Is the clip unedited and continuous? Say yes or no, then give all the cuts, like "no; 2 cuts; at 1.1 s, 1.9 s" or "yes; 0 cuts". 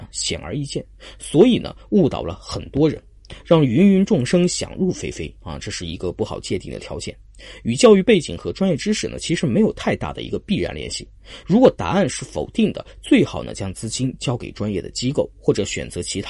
no; 1 cut; at 11.4 s